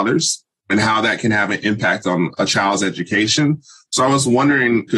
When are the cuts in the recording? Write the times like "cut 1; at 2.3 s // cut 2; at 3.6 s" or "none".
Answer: none